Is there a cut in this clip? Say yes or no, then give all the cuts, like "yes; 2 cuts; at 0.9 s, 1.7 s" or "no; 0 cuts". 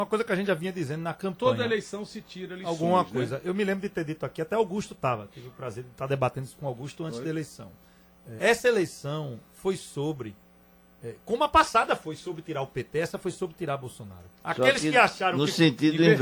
yes; 2 cuts; at 8.4 s, 14.4 s